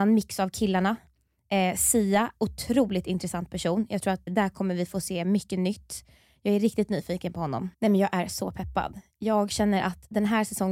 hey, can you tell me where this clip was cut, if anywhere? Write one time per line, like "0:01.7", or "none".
0:04.3
0:07.7